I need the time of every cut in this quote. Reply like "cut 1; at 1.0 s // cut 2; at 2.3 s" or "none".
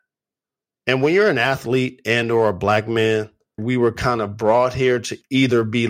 cut 1; at 3.6 s